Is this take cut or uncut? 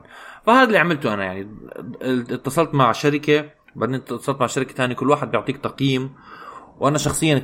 uncut